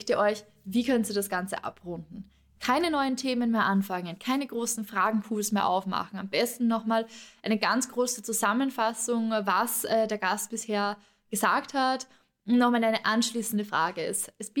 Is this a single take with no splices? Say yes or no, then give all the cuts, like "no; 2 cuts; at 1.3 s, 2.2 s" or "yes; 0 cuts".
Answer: yes; 0 cuts